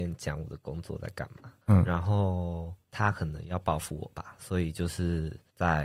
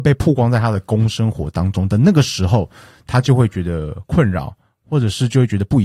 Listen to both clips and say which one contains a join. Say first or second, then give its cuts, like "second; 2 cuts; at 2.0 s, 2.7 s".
first; 1 cut; at 1.6 s